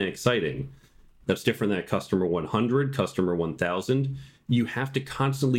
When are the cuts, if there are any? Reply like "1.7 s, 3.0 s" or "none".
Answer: 1.2 s

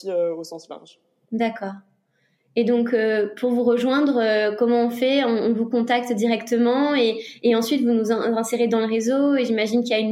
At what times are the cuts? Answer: none

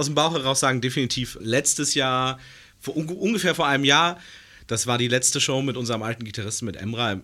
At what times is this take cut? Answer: 1.4 s

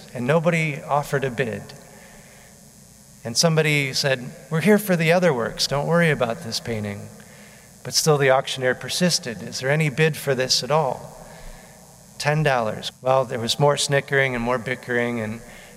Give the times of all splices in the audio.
5.7 s, 12.9 s

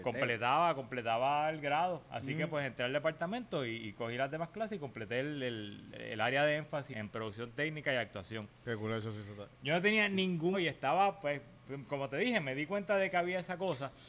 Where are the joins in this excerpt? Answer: 6.9 s, 10.5 s

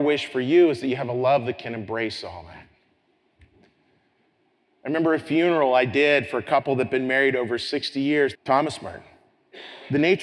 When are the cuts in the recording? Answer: 8.3 s

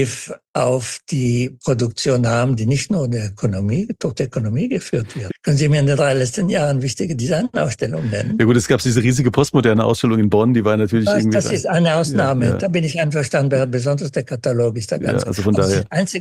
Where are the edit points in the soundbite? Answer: 5.3 s

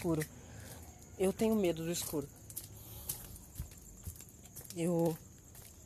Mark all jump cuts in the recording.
none

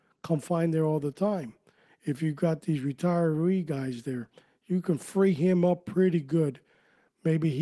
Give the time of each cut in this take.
none

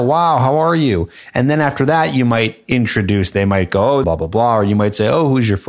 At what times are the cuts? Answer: 4.0 s

